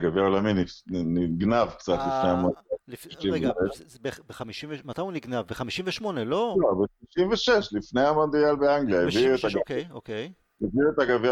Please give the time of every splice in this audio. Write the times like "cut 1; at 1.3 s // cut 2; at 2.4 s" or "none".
cut 1; at 6.5 s